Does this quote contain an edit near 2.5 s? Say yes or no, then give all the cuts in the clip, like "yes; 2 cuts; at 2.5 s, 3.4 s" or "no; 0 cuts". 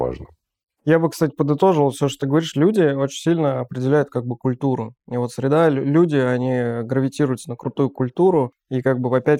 no; 0 cuts